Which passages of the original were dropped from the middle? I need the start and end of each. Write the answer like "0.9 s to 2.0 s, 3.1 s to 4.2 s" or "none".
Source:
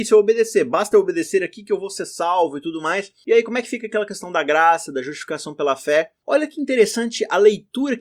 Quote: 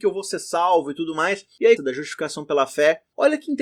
3.4 s to 4.9 s